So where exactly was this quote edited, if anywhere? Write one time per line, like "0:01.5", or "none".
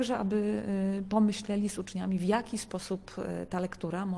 none